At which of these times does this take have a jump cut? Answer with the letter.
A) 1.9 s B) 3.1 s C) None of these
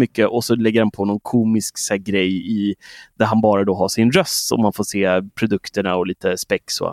C